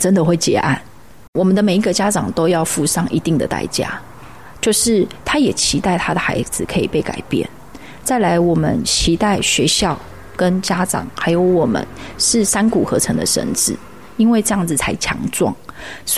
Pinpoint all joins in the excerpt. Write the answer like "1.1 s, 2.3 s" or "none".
1.3 s

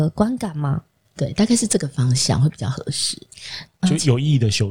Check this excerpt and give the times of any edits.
1.0 s, 3.7 s

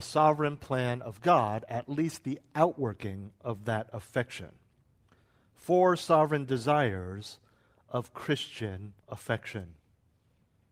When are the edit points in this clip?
9.0 s

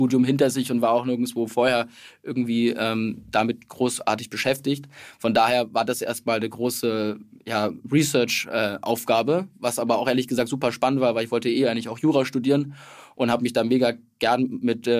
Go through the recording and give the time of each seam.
none

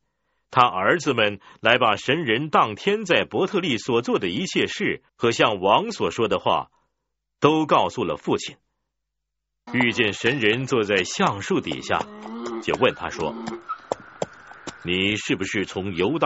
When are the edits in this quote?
5.1 s, 9.7 s

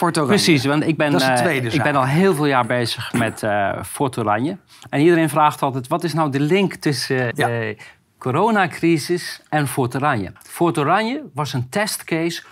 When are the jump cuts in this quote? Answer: 7.3 s, 10.4 s

